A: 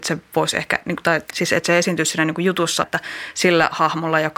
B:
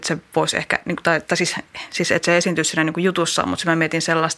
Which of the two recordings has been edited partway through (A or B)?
A